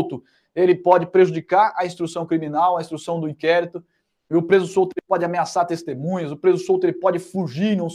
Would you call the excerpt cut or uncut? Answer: uncut